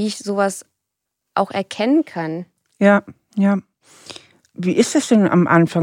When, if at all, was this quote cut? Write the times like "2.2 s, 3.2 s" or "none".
none